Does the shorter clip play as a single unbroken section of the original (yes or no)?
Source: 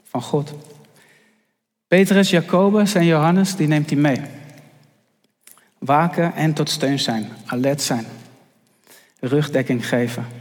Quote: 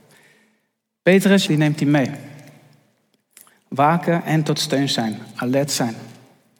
no